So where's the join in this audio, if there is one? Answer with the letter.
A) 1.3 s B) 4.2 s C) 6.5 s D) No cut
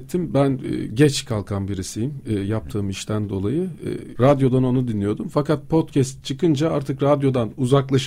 B